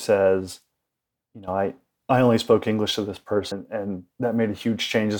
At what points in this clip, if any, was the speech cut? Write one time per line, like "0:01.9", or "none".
0:03.5